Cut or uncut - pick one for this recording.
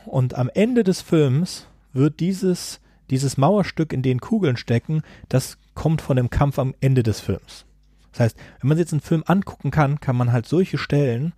uncut